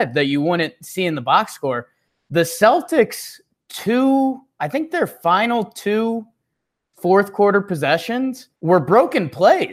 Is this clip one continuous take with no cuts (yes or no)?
no